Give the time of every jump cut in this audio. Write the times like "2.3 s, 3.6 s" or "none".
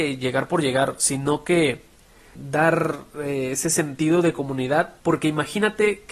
5.0 s